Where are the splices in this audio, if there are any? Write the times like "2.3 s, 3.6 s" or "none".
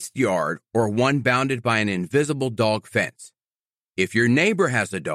none